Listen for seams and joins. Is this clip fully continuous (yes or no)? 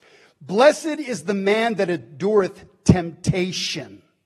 yes